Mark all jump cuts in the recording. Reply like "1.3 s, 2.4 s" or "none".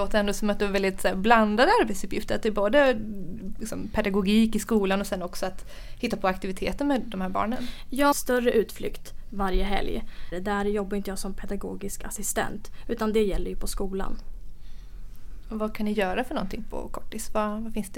8.1 s, 10.3 s